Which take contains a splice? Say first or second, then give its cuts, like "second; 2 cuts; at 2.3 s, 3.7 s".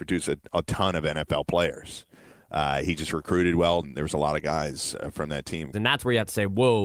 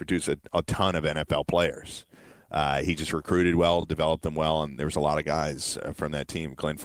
first; 2 cuts; at 3.8 s, 5.7 s